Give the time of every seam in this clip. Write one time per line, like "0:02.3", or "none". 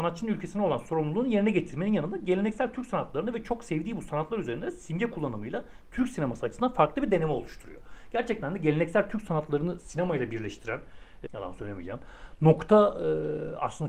0:11.3